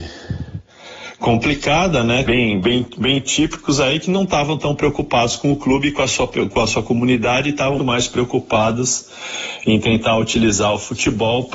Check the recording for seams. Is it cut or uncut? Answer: cut